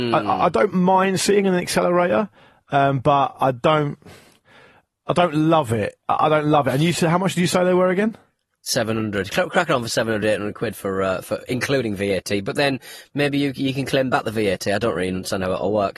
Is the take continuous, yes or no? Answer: yes